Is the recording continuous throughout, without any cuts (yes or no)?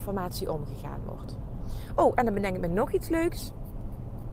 yes